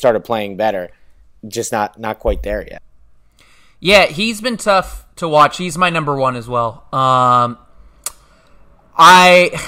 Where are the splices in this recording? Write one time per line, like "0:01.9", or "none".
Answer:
none